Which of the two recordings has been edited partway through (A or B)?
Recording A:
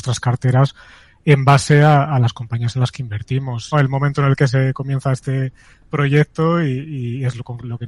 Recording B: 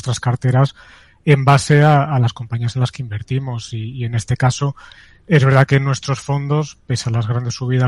A